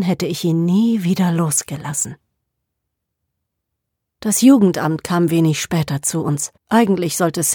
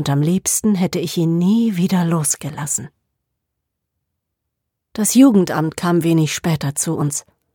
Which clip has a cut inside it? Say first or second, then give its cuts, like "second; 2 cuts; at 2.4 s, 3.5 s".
first; 1 cut; at 6.6 s